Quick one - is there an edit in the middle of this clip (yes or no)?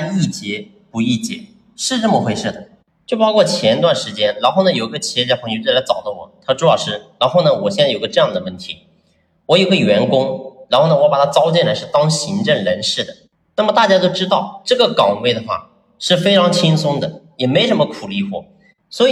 no